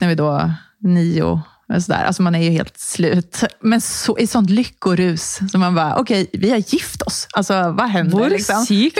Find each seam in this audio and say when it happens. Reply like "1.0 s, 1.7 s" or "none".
none